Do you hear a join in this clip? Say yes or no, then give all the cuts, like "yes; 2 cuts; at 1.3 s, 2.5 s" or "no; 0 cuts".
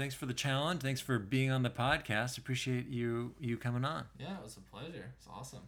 no; 0 cuts